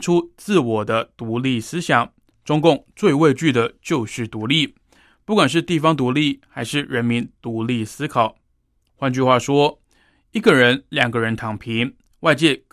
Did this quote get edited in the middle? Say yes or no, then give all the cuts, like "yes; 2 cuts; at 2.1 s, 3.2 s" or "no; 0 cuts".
no; 0 cuts